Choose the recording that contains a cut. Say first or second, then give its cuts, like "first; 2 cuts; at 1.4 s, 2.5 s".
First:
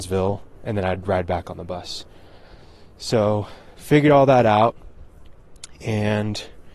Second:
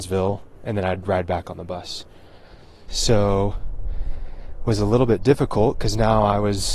second; 1 cut; at 2.9 s